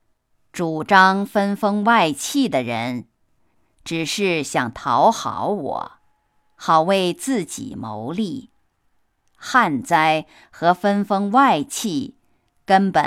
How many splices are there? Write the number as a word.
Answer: zero